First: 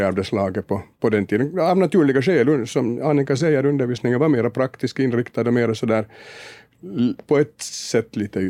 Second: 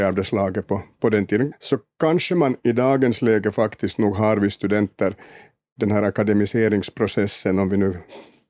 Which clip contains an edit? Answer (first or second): second